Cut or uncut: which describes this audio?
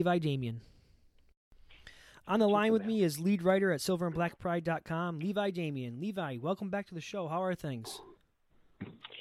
uncut